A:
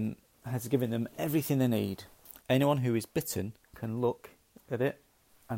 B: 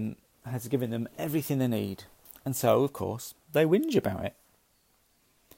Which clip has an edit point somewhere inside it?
A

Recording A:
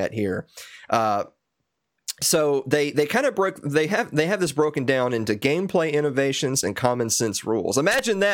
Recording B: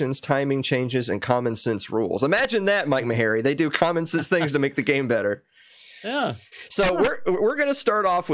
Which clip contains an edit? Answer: A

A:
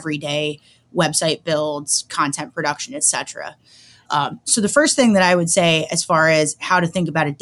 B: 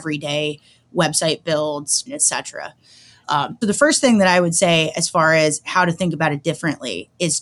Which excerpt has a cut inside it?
B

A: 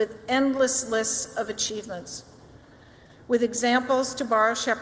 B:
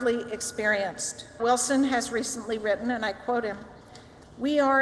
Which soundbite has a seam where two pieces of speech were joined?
B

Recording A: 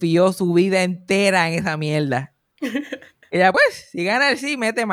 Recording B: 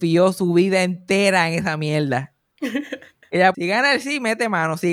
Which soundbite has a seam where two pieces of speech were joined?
B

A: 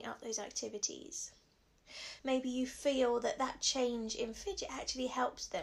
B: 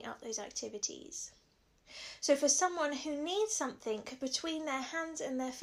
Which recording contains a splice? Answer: A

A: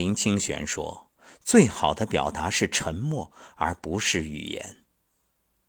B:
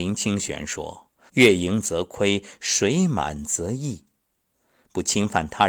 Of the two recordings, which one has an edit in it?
B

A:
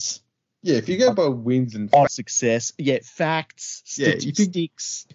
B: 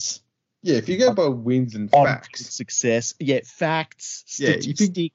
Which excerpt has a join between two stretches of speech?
A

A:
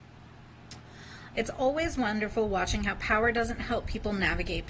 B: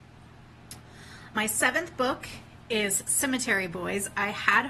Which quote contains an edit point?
A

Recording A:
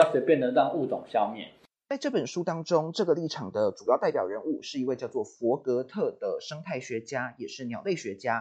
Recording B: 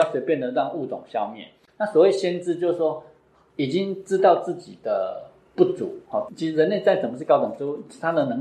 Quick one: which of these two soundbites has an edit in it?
B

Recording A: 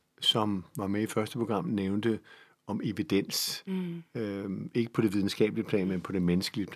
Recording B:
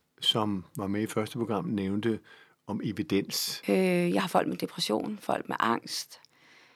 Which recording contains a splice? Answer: B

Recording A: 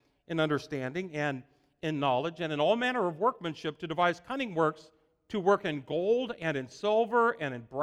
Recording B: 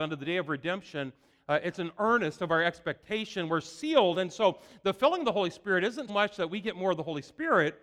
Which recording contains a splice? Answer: B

